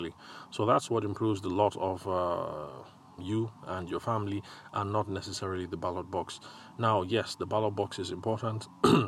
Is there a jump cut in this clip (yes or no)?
yes